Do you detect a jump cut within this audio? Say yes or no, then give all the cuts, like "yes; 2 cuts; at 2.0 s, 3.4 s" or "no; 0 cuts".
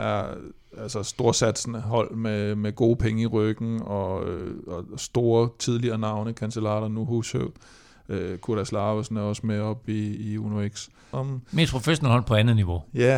yes; 1 cut; at 11.1 s